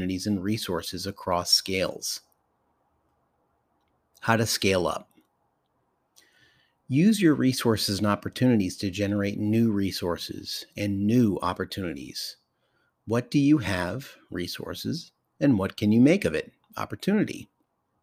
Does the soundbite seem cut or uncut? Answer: uncut